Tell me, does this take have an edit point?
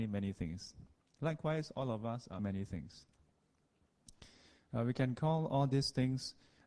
yes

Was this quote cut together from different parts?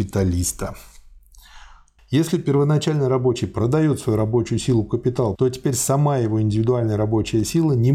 yes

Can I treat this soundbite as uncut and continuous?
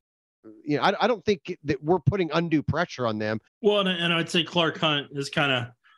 no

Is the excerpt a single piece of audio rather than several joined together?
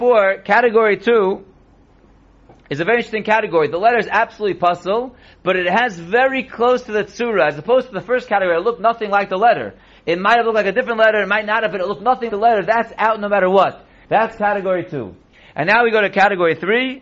no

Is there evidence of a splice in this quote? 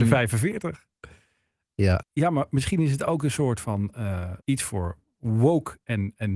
yes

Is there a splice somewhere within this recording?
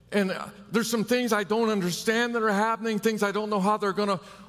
no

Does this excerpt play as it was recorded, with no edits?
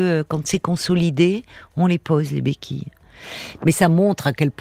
no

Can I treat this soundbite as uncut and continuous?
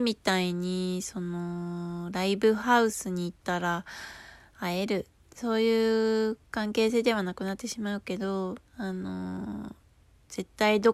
no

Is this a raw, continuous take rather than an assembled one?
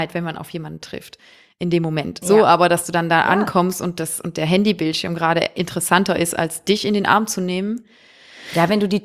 no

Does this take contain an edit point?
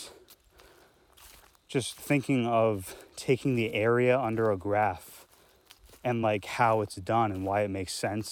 no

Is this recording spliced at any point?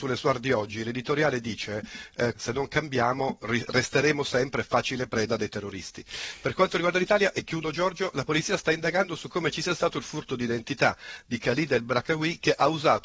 yes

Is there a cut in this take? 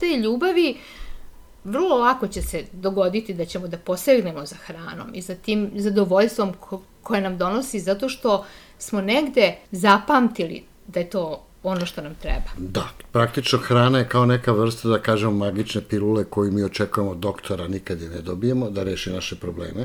yes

